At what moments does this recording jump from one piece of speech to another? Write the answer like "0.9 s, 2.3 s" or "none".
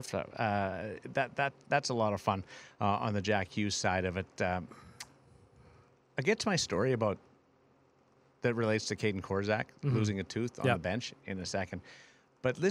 none